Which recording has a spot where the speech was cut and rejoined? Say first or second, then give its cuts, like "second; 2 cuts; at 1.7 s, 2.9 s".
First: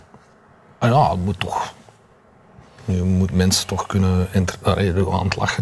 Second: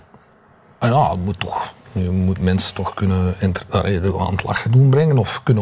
second; 1 cut; at 1.8 s